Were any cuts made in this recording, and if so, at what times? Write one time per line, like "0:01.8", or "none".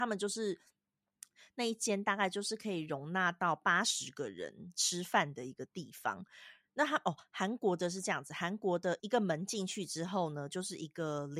0:09.0

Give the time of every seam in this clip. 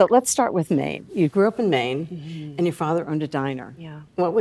none

